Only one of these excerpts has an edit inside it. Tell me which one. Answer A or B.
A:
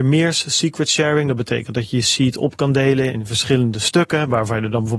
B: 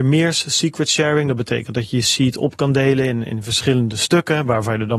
A